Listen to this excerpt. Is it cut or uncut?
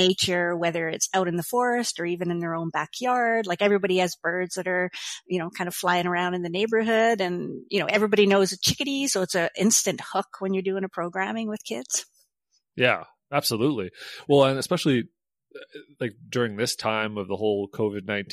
uncut